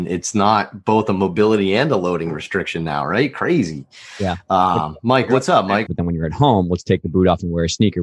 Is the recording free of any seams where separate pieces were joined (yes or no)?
no